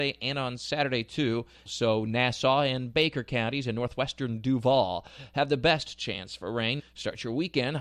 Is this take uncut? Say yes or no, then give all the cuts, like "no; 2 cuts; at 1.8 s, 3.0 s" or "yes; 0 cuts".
no; 2 cuts; at 1.7 s, 6.8 s